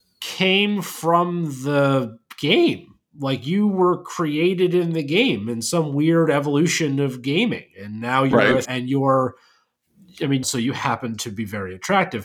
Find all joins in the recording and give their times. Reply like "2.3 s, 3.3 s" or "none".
8.6 s, 10.4 s